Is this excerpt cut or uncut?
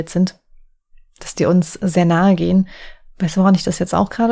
uncut